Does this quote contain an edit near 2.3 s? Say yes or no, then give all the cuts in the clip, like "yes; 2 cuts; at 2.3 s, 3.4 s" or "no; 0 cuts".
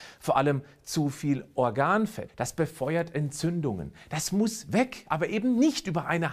yes; 1 cut; at 2.3 s